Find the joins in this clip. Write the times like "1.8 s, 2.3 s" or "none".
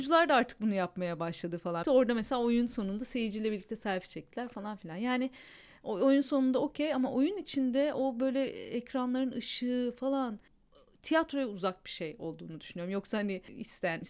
1.8 s